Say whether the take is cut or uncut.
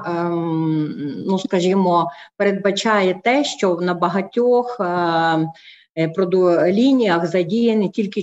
uncut